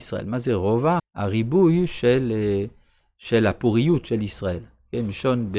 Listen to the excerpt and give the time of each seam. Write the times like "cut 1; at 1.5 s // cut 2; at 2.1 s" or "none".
cut 1; at 1.0 s